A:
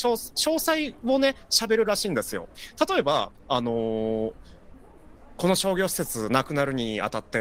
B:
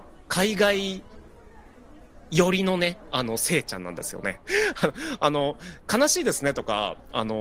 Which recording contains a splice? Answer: B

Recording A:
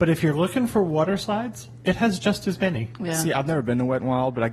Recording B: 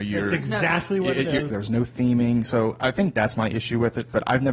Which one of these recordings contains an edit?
B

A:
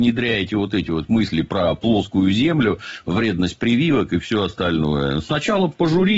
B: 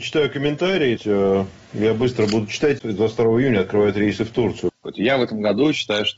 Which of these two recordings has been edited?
B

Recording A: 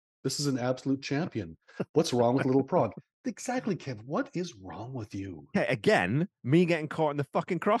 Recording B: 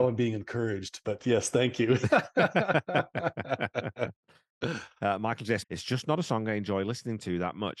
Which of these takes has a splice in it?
B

